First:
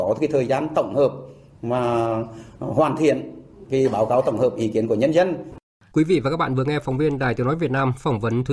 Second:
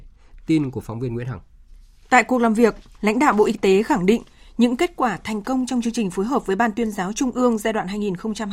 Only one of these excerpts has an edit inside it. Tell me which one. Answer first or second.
first